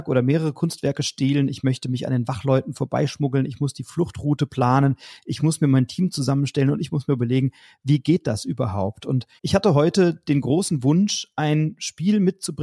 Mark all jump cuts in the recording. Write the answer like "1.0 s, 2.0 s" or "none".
9.4 s